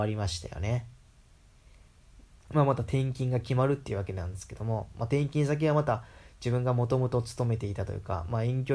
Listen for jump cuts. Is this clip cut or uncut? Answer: cut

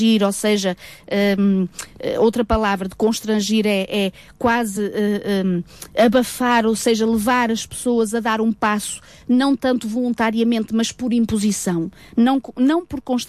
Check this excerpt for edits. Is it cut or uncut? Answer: uncut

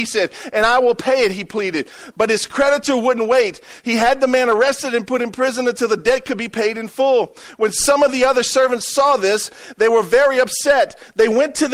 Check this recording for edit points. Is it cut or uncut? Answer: uncut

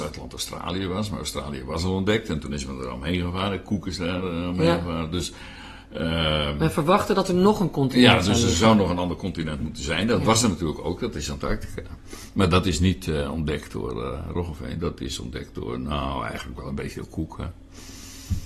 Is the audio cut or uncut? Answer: uncut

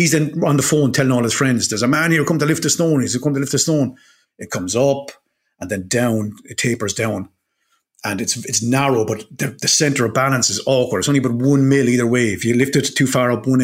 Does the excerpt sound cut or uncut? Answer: cut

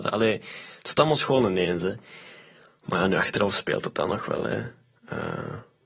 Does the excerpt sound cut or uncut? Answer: uncut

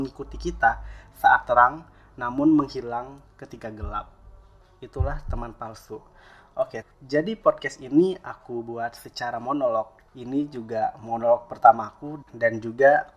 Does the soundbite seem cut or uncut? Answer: cut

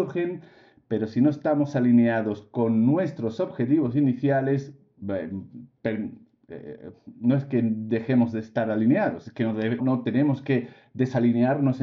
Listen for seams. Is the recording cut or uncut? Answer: cut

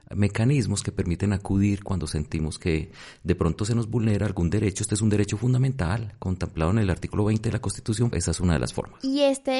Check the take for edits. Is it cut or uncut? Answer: cut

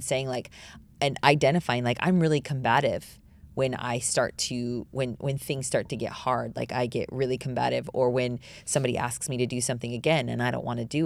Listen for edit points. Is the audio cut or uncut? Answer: uncut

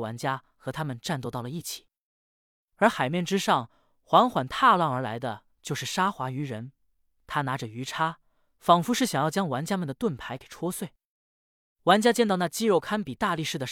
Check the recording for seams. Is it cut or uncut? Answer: uncut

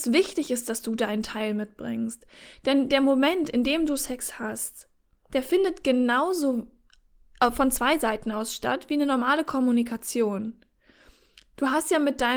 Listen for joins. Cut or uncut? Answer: uncut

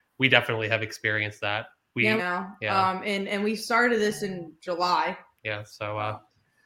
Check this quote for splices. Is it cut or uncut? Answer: cut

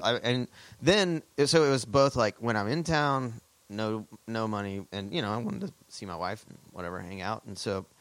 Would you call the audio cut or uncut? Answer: cut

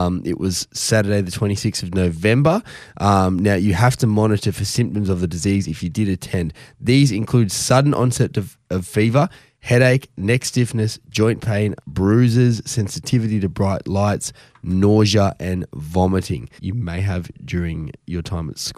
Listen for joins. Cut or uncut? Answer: cut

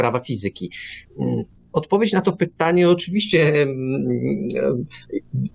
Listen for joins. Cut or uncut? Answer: cut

